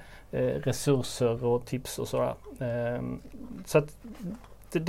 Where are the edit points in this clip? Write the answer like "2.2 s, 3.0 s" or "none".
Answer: none